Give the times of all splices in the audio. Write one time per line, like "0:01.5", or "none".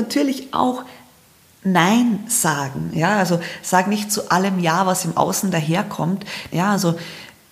0:06.5